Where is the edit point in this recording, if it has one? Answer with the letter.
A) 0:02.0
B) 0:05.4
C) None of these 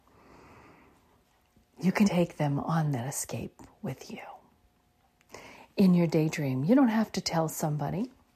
A